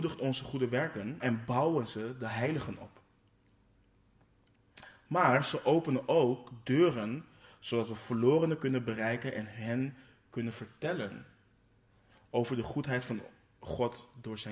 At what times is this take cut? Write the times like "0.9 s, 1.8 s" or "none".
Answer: 1.2 s

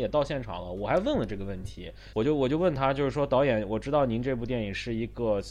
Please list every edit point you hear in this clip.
2.1 s

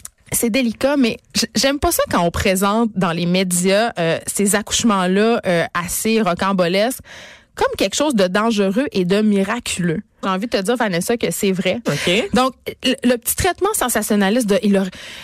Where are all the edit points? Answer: 10.2 s, 11.9 s

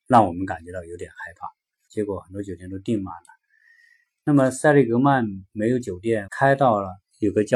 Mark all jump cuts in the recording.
1.9 s, 6.3 s

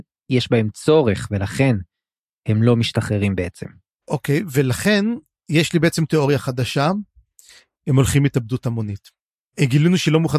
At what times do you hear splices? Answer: 7.7 s

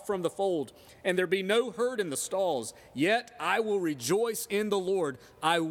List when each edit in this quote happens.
none

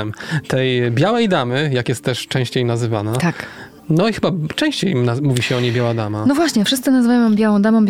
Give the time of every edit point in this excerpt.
3.8 s

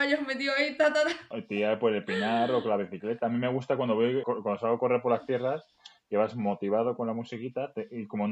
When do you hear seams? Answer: 4.2 s

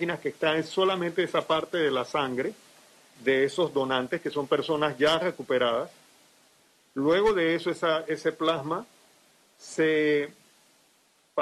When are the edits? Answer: 3.2 s

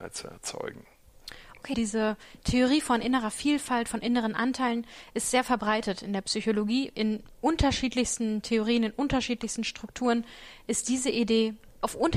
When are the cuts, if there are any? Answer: 1.7 s

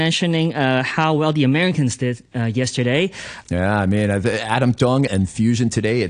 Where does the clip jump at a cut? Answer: 3.4 s, 5.1 s

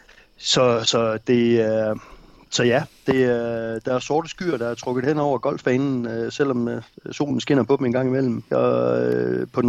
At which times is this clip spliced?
8.5 s

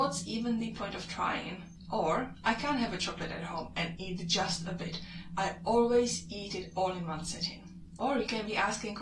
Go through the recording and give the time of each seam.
none

